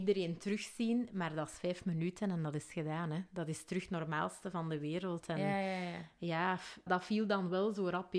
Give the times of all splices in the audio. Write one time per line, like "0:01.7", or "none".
0:06.9